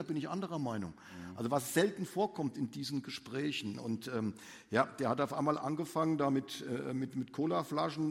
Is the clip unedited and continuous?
yes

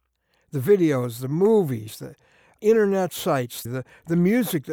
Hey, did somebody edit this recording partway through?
yes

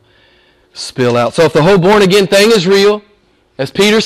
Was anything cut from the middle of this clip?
no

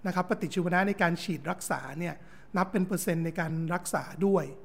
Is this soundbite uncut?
yes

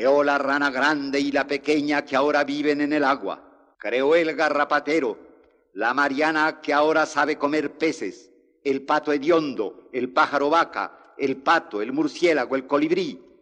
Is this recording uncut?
no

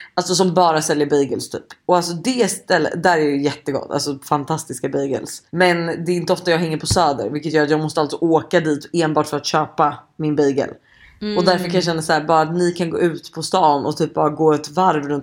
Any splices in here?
no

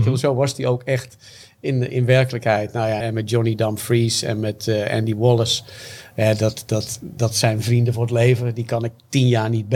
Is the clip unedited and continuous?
no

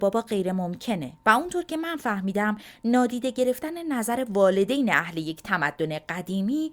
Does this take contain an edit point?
no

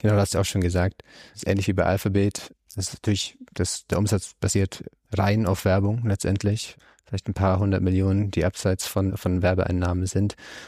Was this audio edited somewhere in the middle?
yes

